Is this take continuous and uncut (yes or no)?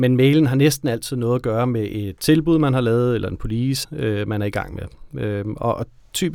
no